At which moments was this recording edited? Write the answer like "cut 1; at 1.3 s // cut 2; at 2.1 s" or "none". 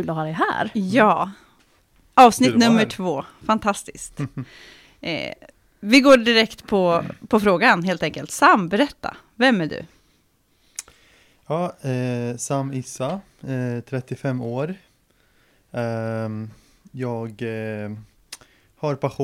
none